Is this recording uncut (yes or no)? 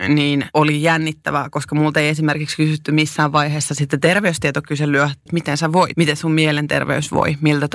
no